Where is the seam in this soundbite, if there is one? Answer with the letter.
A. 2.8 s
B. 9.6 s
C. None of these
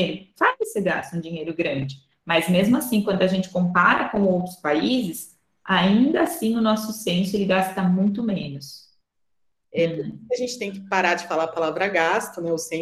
B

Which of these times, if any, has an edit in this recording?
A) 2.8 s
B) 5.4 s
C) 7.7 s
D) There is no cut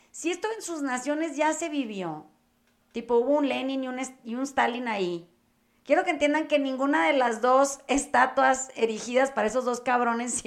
D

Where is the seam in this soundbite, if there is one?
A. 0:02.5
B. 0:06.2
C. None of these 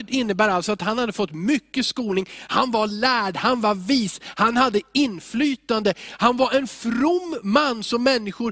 A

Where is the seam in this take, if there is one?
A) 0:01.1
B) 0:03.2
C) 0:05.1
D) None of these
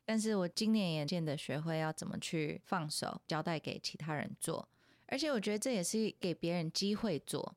A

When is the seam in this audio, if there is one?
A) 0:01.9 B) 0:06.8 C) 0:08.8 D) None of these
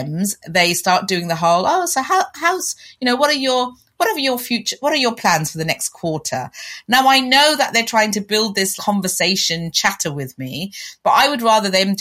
C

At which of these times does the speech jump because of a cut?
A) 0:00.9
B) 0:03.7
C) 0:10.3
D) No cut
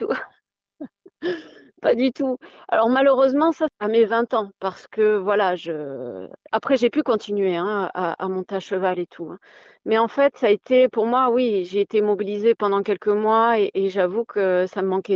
B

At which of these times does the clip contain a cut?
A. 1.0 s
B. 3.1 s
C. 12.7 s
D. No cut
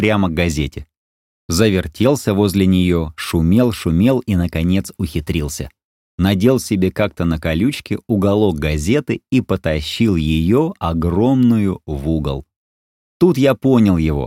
D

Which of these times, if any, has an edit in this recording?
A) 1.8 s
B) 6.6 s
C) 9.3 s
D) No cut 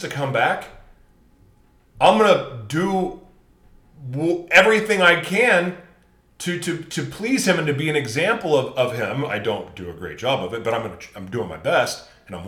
D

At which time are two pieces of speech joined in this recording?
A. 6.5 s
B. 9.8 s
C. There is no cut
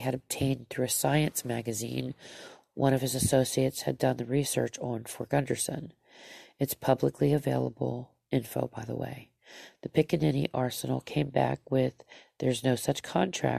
C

